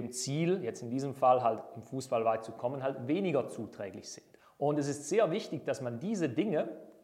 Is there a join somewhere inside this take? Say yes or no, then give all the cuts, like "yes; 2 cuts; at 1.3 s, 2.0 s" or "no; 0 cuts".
no; 0 cuts